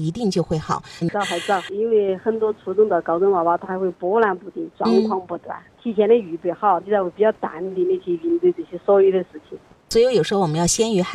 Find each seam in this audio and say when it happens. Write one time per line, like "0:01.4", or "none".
0:01.0
0:05.7
0:06.8